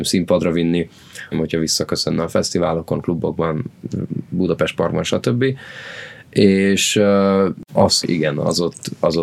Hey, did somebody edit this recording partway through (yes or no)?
yes